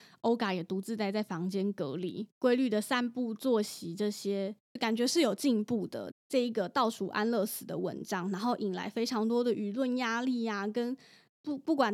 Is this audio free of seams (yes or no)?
no